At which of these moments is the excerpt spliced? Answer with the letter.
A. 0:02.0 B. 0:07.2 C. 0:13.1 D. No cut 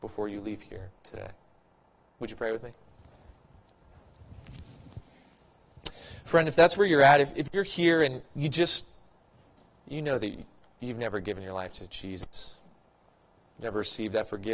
D